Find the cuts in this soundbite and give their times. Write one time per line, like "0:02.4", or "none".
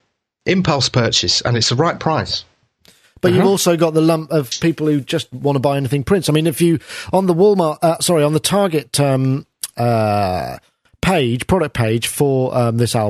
none